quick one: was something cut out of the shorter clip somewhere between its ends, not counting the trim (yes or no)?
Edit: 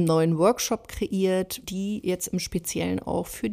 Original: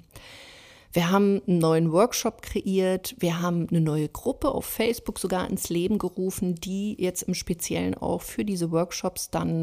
yes